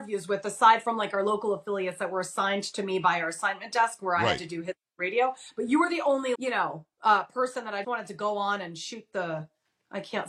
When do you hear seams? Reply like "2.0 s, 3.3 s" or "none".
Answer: 6.3 s, 7.8 s

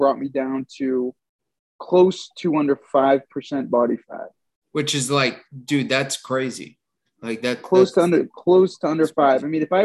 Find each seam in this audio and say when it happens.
none

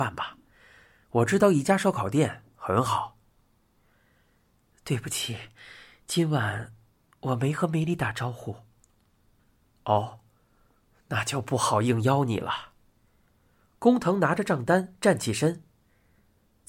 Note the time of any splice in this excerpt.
none

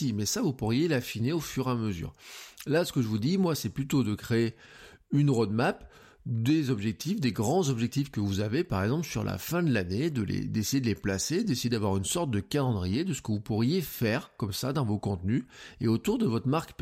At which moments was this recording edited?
none

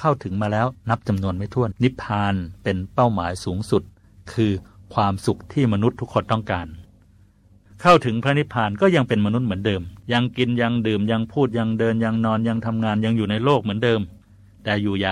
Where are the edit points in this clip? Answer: 1.7 s, 10.0 s

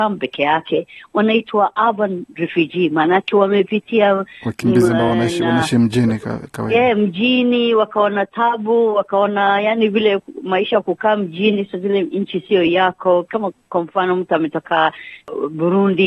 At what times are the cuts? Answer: none

